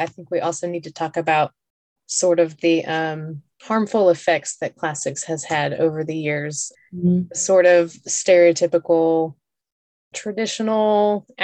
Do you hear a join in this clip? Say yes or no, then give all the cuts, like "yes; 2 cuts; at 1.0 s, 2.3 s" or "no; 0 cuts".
no; 0 cuts